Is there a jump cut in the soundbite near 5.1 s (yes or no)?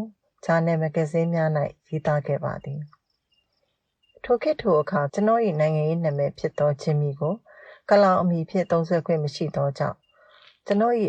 yes